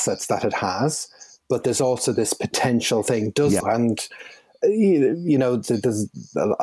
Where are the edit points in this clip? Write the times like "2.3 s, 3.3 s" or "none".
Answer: 3.6 s